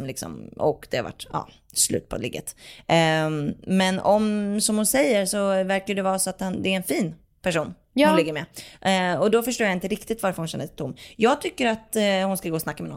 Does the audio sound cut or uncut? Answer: uncut